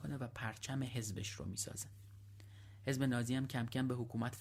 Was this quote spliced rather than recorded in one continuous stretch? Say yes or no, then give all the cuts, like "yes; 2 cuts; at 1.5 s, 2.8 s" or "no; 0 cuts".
no; 0 cuts